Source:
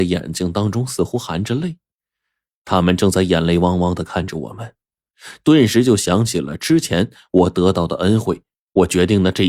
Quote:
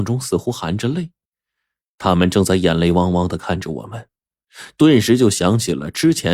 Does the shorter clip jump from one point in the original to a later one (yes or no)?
no